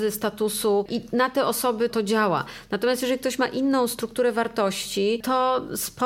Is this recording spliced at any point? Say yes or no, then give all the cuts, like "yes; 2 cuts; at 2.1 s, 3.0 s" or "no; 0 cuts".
yes; 1 cut; at 1.9 s